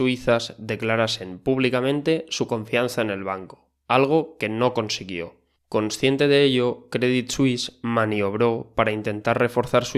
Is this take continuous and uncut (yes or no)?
no